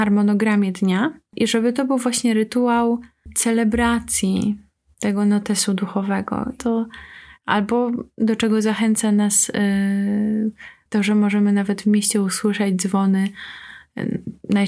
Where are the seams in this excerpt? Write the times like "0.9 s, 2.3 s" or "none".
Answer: 6.6 s